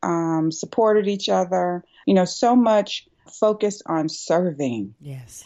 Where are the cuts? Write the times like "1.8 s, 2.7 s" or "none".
2.0 s, 3.3 s